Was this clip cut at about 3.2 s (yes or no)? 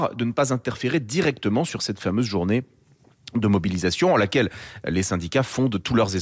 no